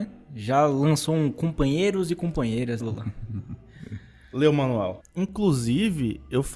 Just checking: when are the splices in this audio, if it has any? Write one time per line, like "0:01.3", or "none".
0:02.8
0:05.0